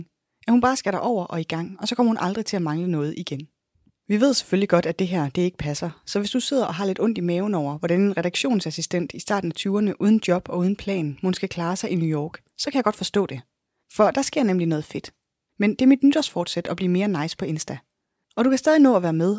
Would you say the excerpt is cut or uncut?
cut